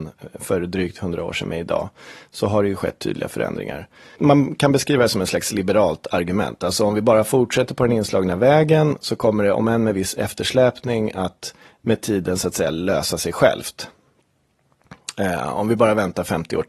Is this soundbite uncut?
yes; 0 cuts

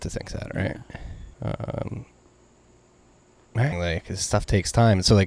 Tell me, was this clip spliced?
yes; 2 cuts; at 1.3 s, 3.7 s

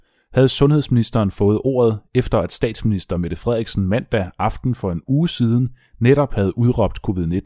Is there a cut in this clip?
no; 0 cuts

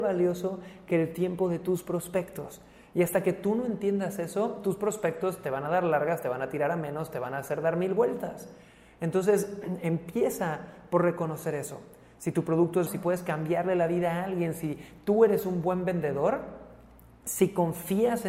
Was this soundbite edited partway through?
yes; 1 cut; at 12.9 s

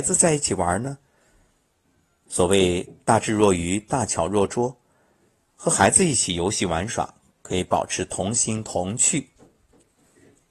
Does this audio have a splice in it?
no; 0 cuts

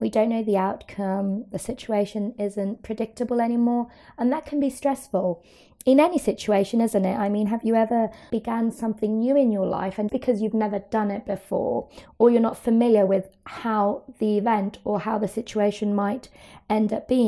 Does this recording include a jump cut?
yes; 2 cuts; at 8.3 s, 10.1 s

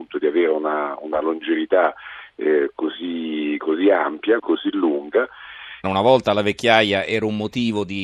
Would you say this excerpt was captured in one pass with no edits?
no; 2 cuts; at 4.4 s, 5.8 s

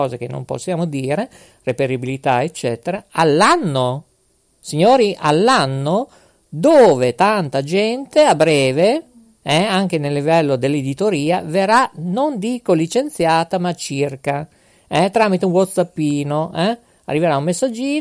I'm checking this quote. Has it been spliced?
no; 0 cuts

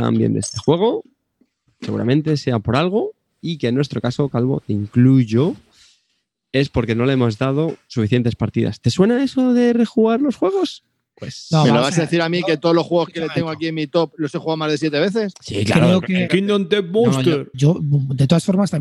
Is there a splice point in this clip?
yes; 2 cuts; at 16.3 s, 17.5 s

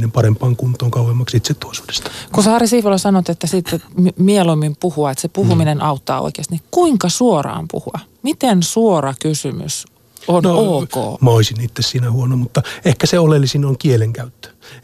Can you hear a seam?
yes; 1 cut; at 11.2 s

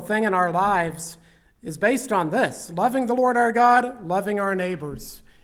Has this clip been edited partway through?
no; 0 cuts

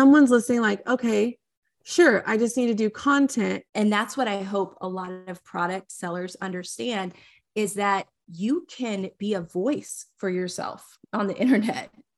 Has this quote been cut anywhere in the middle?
yes; 1 cut; at 3.7 s

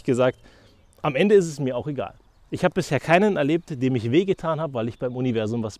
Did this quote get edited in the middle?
no; 0 cuts

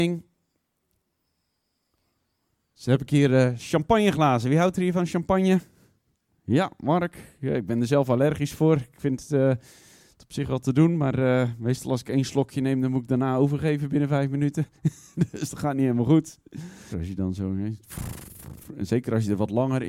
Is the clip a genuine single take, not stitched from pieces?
no; 1 cut; at 16.9 s

